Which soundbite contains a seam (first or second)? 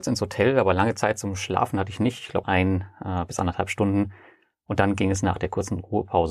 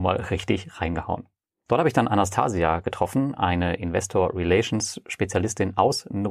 first